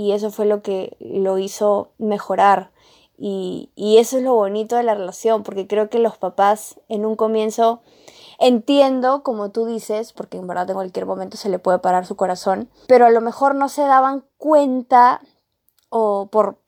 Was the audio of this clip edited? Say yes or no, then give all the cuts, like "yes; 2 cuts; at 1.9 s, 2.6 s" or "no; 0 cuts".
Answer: yes; 2 cuts; at 10.2 s, 12.9 s